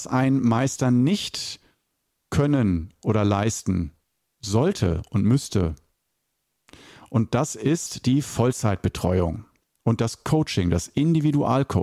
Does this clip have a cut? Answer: no; 0 cuts

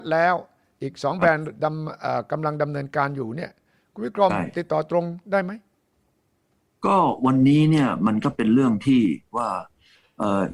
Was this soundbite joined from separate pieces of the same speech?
no; 0 cuts

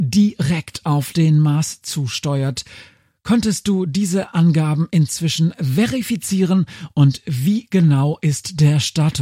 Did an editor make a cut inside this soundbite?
no; 0 cuts

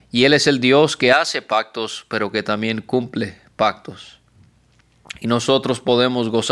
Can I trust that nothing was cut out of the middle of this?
yes; 0 cuts

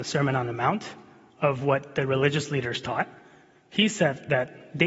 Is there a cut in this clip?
no; 0 cuts

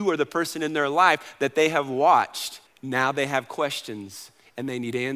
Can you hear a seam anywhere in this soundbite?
yes; 1 cut; at 2.7 s

